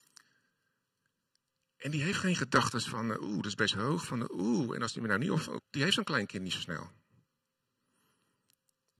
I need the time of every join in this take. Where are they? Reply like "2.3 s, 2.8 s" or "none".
5.6 s